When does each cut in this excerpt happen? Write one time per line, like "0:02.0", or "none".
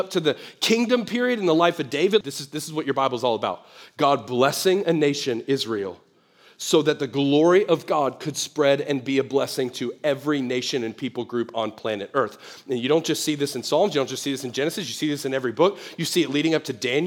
0:02.2